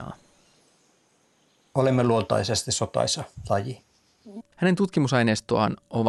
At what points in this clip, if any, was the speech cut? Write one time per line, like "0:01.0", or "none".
0:04.4